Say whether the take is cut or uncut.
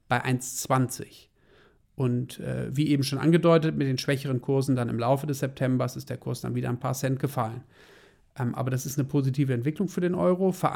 uncut